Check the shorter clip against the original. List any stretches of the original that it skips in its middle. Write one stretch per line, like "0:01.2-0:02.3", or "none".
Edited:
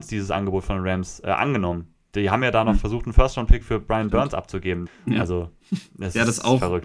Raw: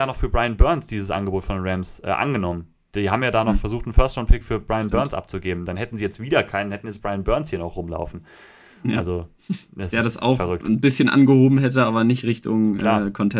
0:05.7-0:08.6